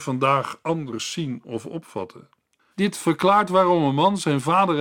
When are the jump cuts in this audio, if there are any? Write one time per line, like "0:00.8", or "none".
0:02.7